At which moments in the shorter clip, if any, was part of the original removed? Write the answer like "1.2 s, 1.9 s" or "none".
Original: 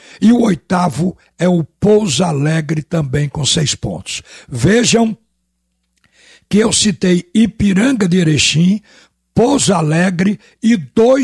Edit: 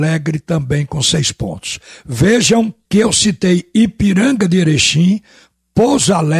2.8 s